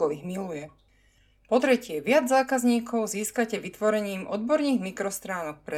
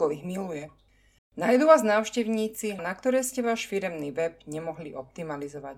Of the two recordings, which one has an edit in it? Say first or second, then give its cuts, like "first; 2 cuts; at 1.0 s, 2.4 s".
second; 2 cuts; at 1.2 s, 2.8 s